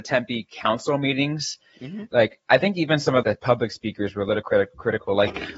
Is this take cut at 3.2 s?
yes; 2 cuts; at 2.1 s, 3.2 s

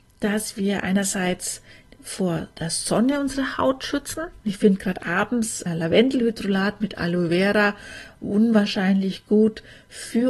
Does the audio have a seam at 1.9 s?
no; 2 cuts; at 4.4 s, 5.7 s

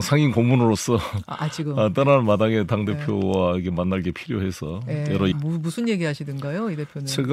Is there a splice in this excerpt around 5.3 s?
yes; 1 cut; at 5.3 s

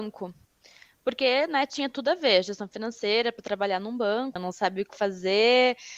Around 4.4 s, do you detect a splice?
yes; 1 cut; at 4.4 s

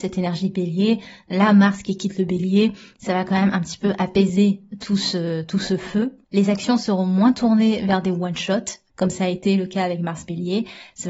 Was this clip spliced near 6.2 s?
yes; 1 cut; at 6.2 s

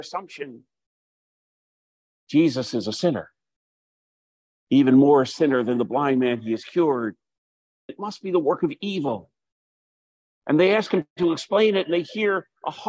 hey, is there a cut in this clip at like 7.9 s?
yes; 1 cut; at 7.9 s

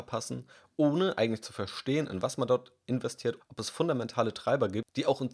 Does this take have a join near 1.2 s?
no; 1 cut; at 3.4 s

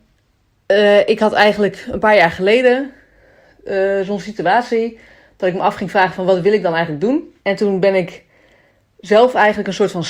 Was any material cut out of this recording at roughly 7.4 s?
yes; 1 cut; at 7.4 s

